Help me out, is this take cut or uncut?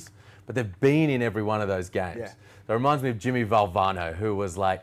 uncut